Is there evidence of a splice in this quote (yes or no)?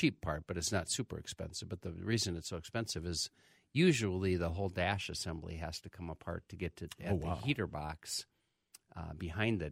no